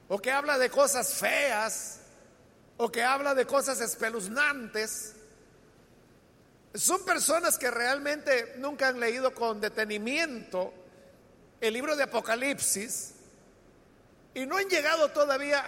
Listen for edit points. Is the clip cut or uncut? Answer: uncut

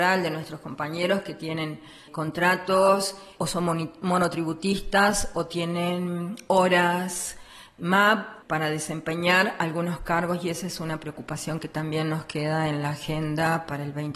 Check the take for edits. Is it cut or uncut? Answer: uncut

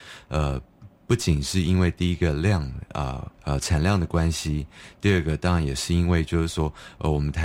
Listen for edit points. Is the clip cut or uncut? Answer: cut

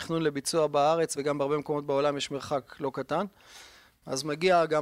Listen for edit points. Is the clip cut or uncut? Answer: uncut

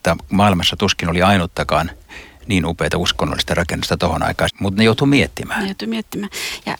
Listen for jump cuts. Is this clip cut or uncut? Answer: cut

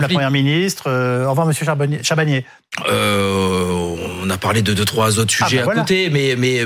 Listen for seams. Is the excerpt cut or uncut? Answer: uncut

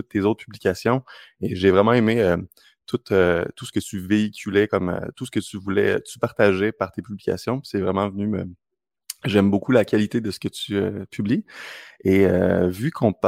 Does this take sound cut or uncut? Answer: uncut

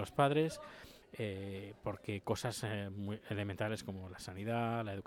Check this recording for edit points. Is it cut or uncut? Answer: cut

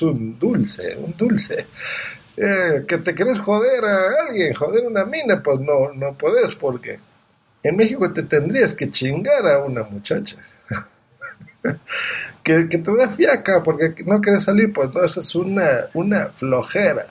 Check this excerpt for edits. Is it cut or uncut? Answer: uncut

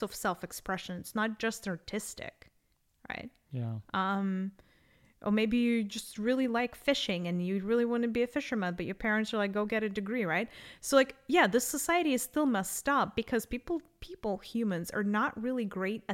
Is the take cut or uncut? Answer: uncut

